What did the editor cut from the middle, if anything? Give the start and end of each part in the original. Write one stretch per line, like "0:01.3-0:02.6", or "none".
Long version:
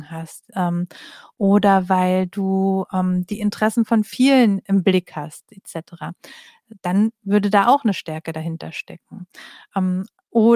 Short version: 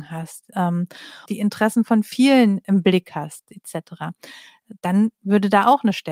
0:01.3-0:03.3